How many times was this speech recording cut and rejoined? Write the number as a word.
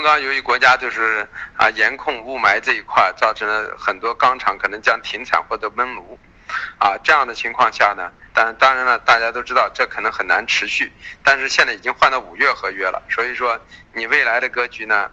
one